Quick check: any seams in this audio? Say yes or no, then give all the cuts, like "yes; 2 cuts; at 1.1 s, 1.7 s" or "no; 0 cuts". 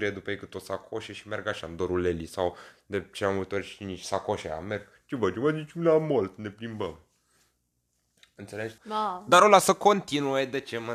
yes; 1 cut; at 8.8 s